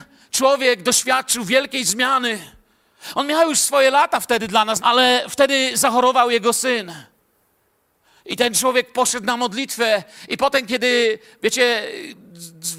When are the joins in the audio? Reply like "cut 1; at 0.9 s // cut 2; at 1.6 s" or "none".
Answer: cut 1; at 4.8 s